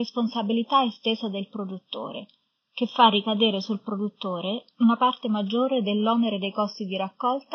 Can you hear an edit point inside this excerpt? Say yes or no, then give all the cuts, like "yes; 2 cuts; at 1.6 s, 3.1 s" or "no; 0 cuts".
no; 0 cuts